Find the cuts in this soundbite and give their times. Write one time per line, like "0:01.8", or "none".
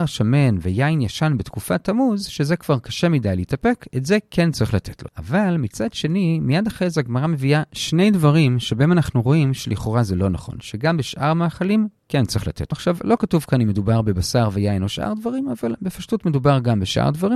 0:05.1
0:12.7